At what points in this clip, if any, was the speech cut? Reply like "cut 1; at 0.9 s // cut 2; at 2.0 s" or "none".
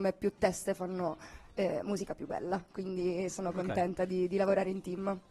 none